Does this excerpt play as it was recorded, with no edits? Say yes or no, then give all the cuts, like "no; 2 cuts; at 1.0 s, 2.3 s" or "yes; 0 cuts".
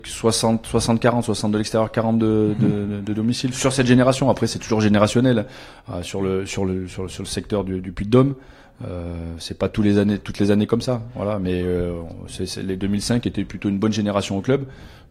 yes; 0 cuts